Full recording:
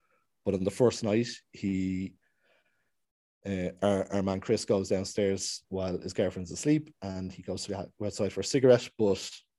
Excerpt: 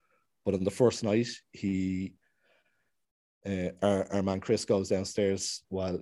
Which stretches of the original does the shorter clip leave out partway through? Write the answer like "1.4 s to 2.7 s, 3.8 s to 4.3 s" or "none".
none